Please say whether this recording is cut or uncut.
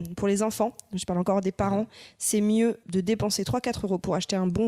cut